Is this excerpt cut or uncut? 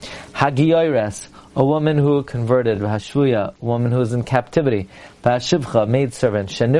uncut